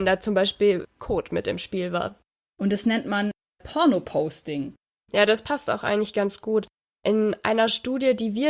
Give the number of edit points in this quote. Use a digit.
1